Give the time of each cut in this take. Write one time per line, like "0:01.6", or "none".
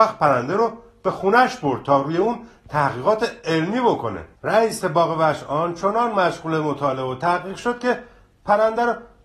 0:04.4